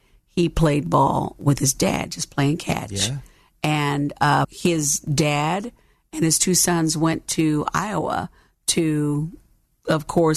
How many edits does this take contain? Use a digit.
1